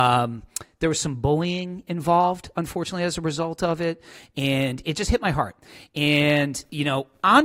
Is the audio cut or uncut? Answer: uncut